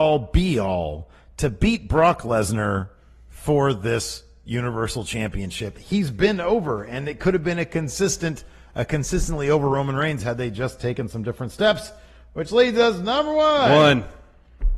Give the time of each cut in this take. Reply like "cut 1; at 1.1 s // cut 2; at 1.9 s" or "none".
cut 1; at 5.7 s